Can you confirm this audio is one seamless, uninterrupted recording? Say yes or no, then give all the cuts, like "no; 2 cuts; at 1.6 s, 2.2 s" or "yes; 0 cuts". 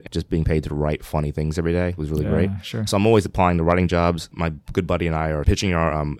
yes; 0 cuts